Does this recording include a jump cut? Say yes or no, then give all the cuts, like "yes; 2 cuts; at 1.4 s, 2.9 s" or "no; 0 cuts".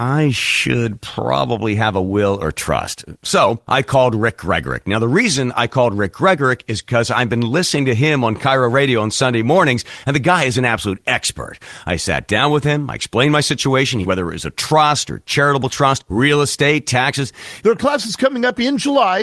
yes; 2 cuts; at 14.0 s, 17.6 s